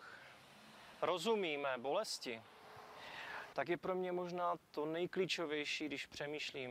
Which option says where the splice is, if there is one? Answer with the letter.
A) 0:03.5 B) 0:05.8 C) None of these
A